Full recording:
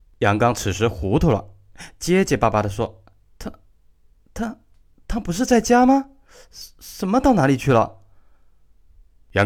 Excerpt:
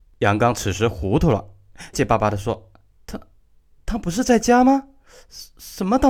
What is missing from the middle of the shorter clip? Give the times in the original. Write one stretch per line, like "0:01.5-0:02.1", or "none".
0:01.9-0:02.3
0:04.1-0:05.0